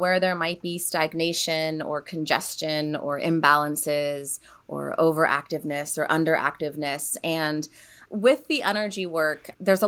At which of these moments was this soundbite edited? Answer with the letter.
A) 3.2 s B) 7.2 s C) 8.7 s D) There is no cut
D